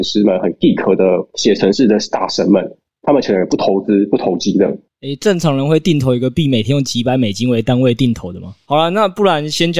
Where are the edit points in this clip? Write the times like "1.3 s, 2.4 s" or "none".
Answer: 4.9 s, 8.6 s